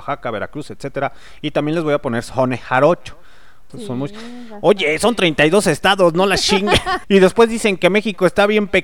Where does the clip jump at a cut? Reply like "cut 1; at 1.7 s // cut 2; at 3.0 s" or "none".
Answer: cut 1; at 3.7 s // cut 2; at 7.0 s